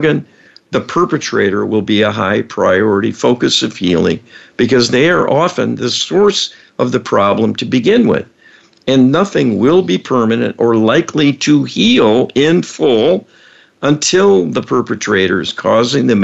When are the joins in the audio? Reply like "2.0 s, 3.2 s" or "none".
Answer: none